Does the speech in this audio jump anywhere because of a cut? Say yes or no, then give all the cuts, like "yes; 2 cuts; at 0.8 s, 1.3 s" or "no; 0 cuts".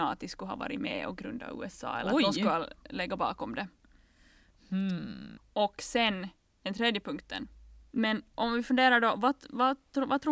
yes; 2 cuts; at 5.4 s, 7.9 s